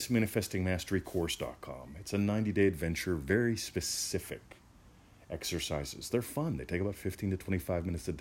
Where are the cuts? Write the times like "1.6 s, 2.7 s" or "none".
none

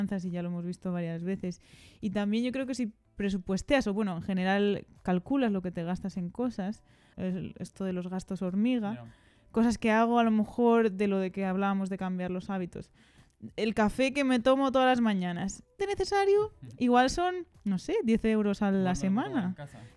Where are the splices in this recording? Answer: 7.1 s, 15.8 s

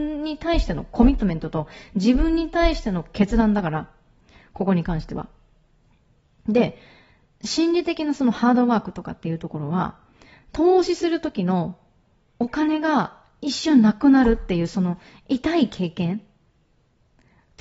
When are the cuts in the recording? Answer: none

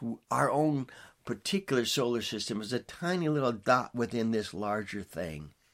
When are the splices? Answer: none

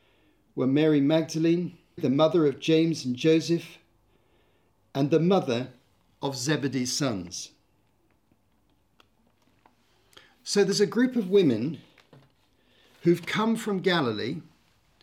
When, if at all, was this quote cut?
2.0 s

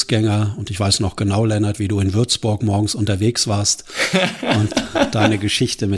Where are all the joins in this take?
none

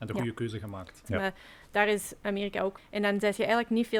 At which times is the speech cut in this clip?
1.0 s, 2.8 s

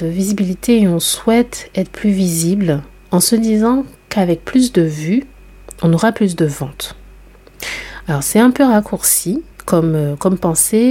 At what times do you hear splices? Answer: 9.5 s

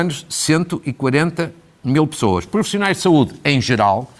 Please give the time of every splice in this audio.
none

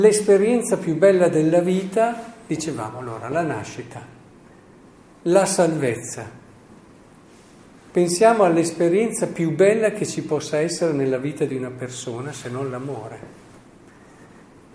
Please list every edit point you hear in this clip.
none

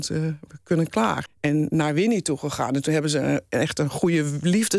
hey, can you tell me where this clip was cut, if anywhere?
1.3 s

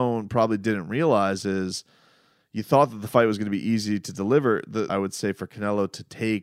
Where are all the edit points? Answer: 4.9 s

